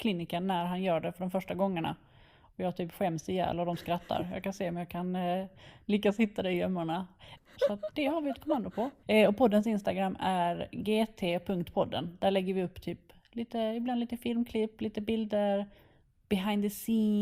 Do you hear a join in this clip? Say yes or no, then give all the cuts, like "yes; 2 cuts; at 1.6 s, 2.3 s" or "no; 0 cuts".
yes; 2 cuts; at 7.4 s, 9.0 s